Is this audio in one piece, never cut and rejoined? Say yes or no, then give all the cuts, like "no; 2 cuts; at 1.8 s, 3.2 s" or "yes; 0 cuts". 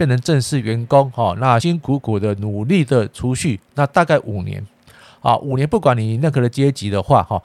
no; 1 cut; at 1.6 s